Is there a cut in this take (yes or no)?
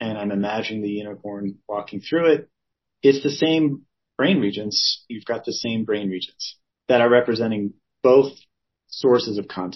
yes